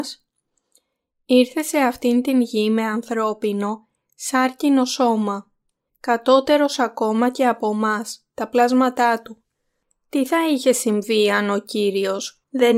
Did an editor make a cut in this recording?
yes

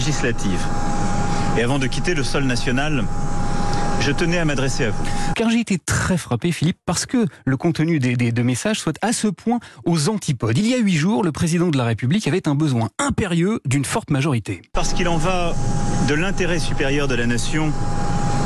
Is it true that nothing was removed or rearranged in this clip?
no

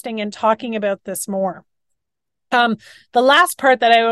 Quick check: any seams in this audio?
no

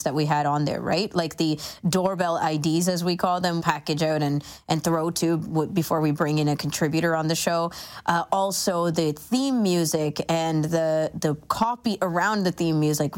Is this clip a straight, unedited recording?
no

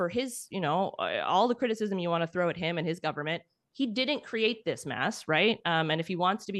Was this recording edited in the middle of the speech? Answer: no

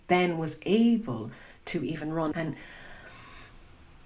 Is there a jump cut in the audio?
yes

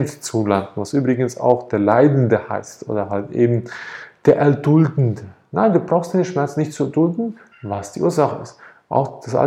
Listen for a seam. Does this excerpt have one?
yes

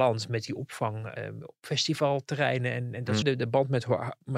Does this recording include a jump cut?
yes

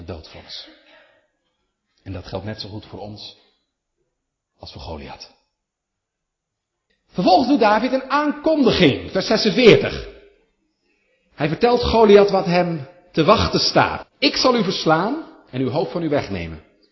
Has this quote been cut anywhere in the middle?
yes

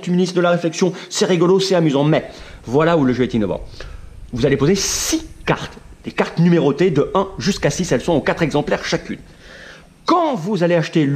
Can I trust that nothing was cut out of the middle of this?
no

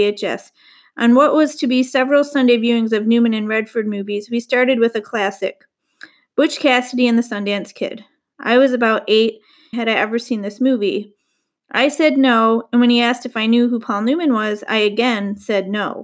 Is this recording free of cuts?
no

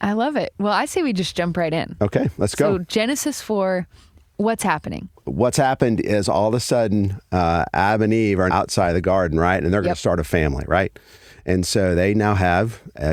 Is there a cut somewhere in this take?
yes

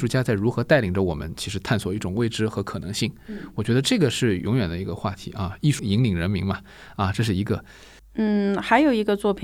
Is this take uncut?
no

